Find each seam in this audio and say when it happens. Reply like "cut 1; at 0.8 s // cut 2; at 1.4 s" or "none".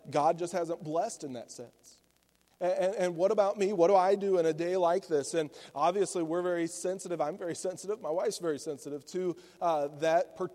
none

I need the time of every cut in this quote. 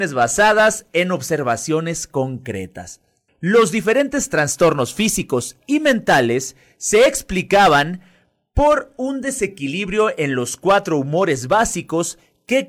cut 1; at 3.3 s

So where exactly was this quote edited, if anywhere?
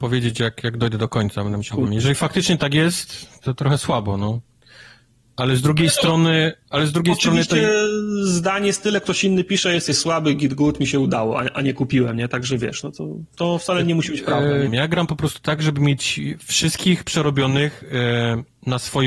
cut 1; at 1.9 s // cut 2; at 14.7 s

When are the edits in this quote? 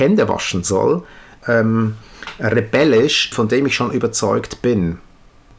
cut 1; at 1.4 s // cut 2; at 3.3 s

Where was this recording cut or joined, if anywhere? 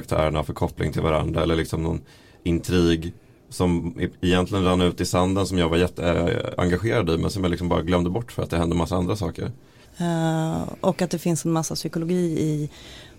cut 1; at 9.8 s

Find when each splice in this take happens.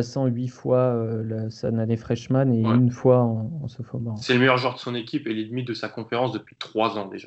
none

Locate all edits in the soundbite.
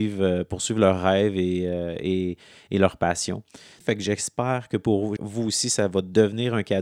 cut 1; at 3.8 s // cut 2; at 5.2 s

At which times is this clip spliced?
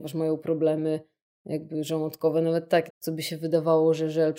cut 1; at 2.9 s

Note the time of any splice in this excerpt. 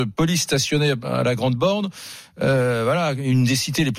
none

